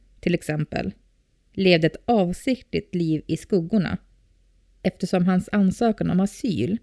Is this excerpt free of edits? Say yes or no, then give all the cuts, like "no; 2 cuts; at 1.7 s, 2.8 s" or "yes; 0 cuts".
yes; 0 cuts